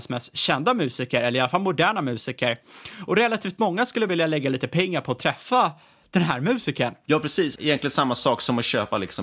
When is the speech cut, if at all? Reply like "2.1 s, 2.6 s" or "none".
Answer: 7.6 s